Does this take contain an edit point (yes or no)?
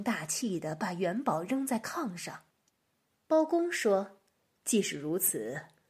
yes